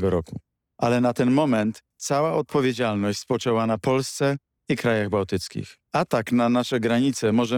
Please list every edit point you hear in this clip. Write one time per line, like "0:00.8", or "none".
0:05.8